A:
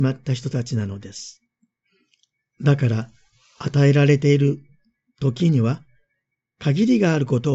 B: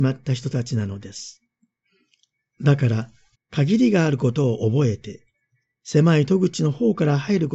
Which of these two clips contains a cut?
B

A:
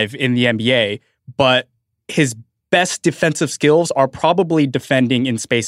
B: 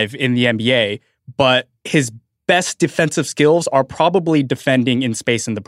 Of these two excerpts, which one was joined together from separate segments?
B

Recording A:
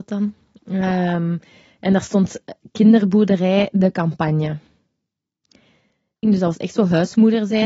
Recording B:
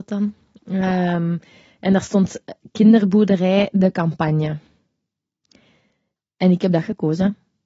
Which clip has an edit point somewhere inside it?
A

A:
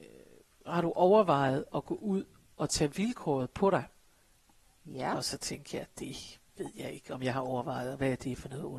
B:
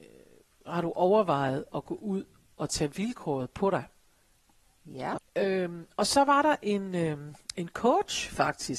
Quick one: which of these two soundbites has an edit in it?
B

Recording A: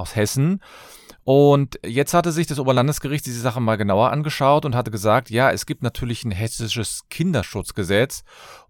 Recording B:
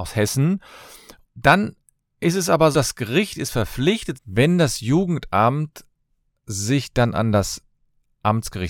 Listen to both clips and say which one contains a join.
B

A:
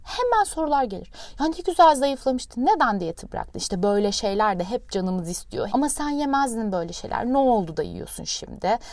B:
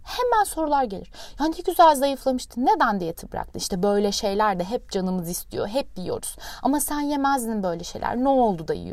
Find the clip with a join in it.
A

